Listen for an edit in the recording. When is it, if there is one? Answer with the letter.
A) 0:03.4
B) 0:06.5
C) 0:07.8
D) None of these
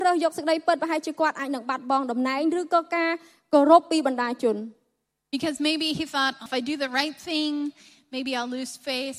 B